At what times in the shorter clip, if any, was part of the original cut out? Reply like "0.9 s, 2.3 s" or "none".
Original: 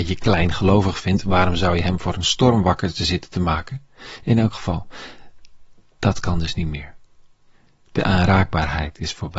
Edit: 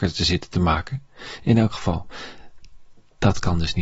none